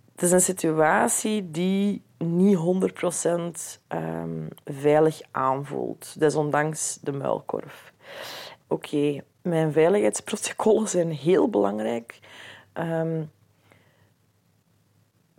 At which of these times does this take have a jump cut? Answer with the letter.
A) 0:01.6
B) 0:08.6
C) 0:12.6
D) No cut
B